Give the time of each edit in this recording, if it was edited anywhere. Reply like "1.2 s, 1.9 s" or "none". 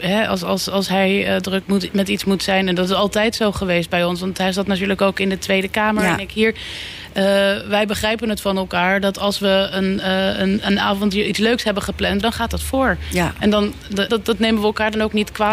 12.2 s, 14.1 s